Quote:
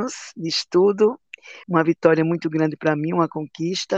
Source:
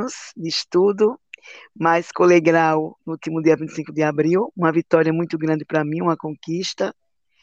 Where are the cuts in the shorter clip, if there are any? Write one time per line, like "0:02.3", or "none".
0:01.6